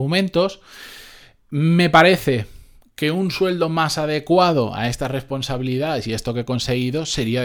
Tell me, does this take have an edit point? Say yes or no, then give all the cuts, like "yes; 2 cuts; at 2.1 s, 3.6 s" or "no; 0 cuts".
no; 0 cuts